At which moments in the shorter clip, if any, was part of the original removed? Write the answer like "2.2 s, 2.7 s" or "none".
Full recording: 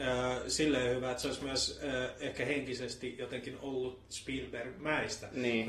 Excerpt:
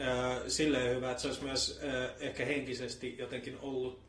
none